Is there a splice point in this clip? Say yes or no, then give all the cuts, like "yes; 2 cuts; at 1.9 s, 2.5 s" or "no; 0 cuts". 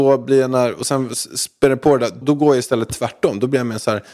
yes; 1 cut; at 2.2 s